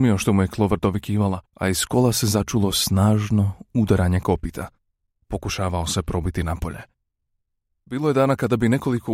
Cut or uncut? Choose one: cut